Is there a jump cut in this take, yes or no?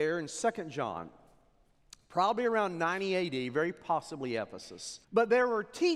yes